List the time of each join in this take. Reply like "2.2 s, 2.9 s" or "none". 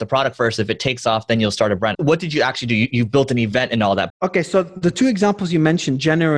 1.9 s, 4.1 s